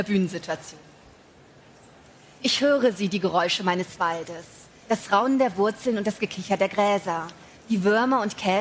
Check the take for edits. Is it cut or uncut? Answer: cut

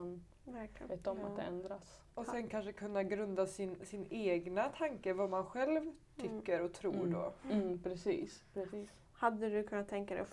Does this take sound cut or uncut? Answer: uncut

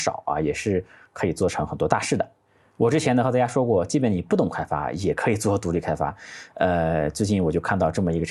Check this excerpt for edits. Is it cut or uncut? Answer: uncut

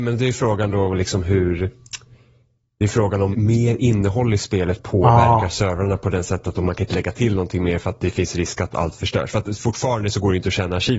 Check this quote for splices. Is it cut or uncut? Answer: cut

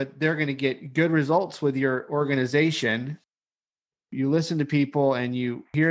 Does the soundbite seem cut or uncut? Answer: uncut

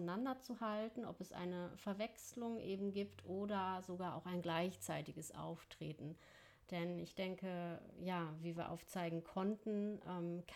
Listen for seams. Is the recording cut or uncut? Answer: uncut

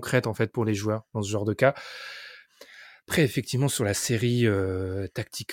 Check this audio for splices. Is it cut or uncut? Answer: uncut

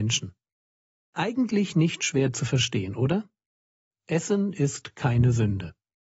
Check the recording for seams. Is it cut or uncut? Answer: uncut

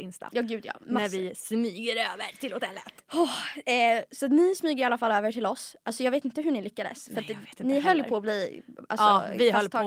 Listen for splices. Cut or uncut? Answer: uncut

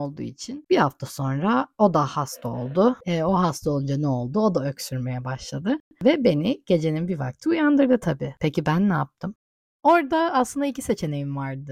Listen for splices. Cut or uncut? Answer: uncut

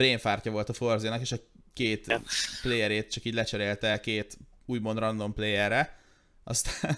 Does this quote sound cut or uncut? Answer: uncut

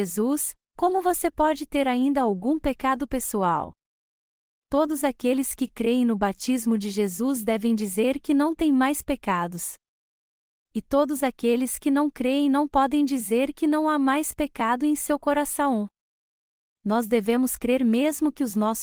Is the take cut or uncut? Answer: uncut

